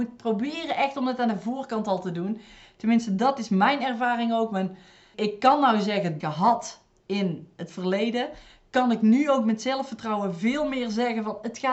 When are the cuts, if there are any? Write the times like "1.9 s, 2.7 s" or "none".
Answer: 5.1 s, 6.2 s